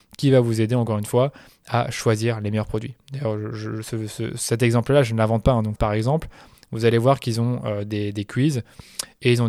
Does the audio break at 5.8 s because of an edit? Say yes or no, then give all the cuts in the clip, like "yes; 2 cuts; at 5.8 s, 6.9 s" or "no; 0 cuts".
yes; 1 cut; at 5.8 s